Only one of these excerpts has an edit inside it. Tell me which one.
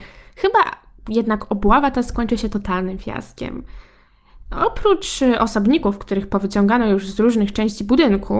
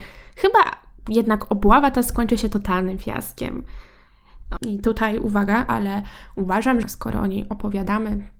second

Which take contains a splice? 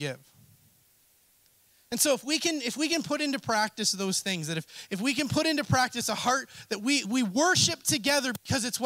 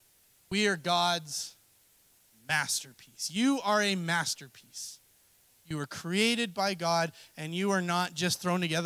first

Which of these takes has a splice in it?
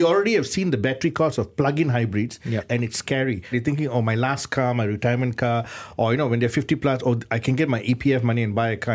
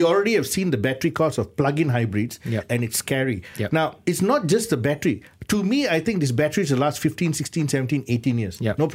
first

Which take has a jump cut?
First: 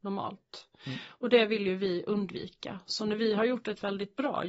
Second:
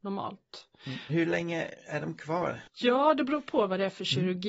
second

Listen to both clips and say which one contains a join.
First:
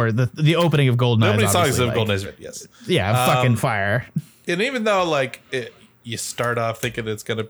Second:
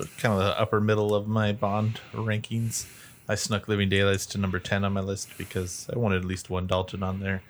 first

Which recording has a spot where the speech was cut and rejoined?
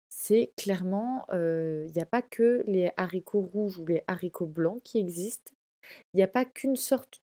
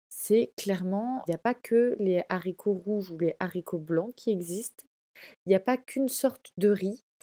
second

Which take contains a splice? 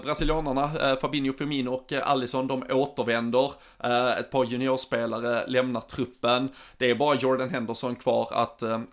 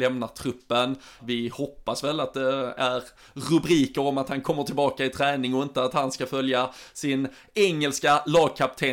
second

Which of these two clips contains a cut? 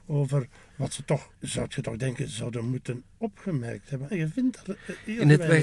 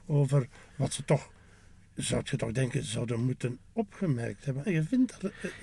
first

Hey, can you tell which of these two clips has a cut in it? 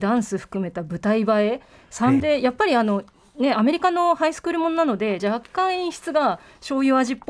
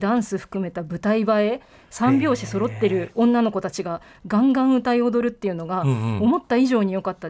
first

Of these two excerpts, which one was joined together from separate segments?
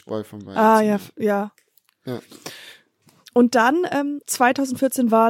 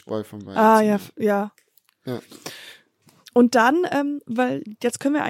first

